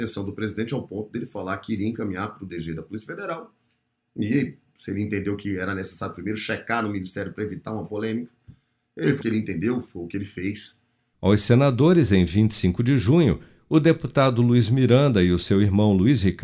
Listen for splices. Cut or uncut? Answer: cut